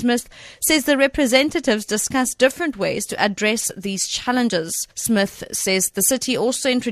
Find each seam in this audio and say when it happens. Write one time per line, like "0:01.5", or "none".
0:04.9